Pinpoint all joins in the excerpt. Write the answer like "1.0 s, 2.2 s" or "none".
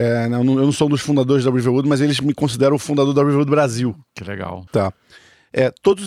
4.7 s